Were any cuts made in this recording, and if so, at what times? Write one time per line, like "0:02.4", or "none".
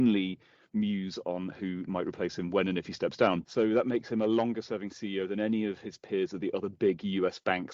0:03.4